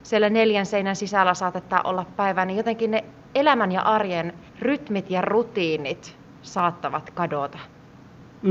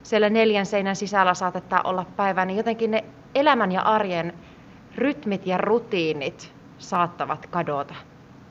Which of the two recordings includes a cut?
first; 1 cut; at 4.5 s

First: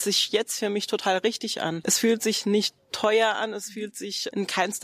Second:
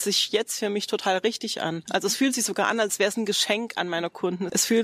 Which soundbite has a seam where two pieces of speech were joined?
first; 1 cut; at 1.8 s

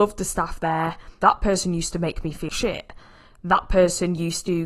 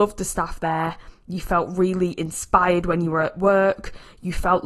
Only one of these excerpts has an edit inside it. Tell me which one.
first; 2 cuts; at 1.2 s, 2.5 s

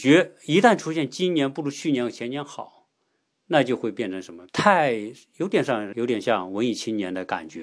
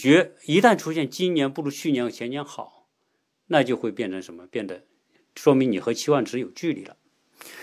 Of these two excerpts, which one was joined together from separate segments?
first; 2 cuts; at 4.5 s, 5.9 s

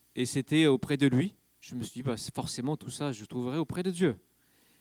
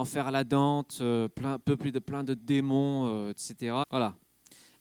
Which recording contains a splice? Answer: second; 1 cut; at 3.8 s

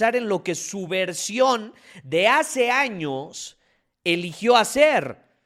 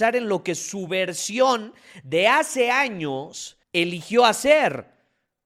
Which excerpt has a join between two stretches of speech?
second; 1 cut; at 3.6 s

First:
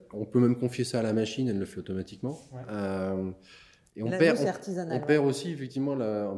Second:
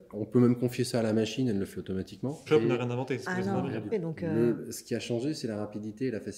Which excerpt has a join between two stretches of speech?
second; 2 cuts; at 2.5 s, 3.9 s

